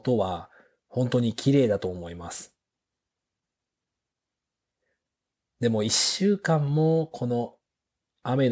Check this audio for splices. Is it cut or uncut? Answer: uncut